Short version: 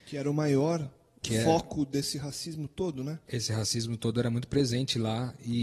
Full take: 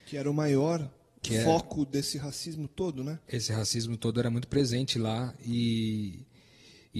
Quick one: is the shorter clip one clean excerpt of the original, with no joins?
yes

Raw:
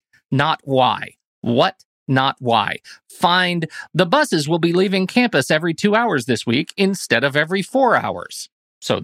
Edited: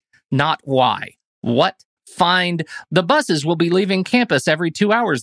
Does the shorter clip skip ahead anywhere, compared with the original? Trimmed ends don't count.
yes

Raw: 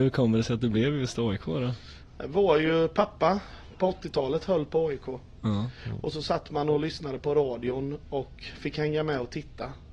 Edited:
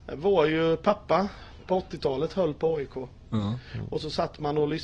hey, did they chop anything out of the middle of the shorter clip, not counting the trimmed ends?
no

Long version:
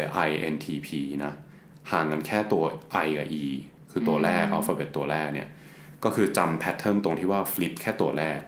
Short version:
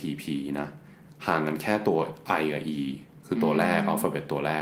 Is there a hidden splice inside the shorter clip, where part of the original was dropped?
no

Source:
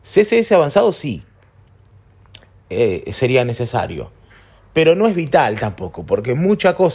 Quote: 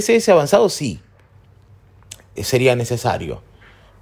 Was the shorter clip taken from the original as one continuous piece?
no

